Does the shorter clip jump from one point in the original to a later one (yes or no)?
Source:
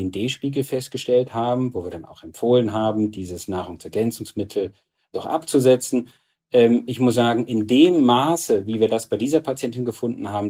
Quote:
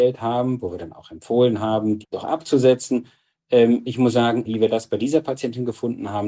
yes